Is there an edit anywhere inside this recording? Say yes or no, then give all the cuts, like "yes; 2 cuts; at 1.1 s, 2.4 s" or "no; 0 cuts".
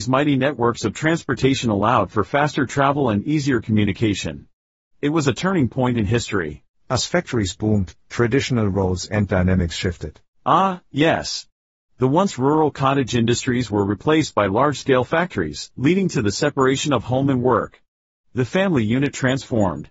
yes; 1 cut; at 6.8 s